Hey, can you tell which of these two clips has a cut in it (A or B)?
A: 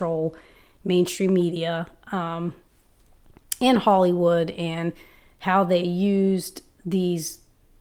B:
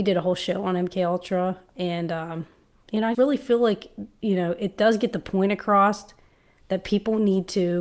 B